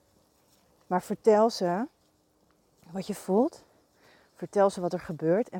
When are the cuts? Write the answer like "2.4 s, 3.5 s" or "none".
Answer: none